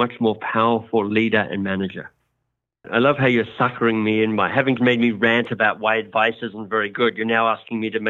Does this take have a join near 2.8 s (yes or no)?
yes